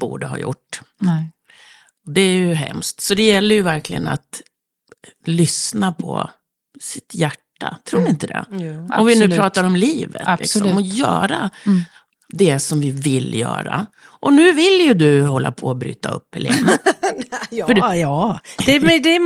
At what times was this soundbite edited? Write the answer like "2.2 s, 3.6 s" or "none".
none

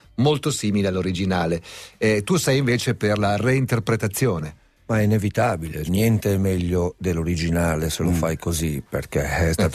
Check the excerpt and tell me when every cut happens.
5.9 s

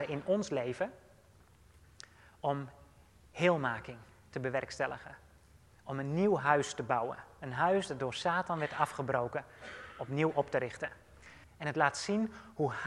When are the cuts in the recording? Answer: 11.4 s

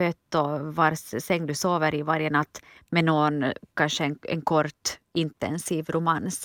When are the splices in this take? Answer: none

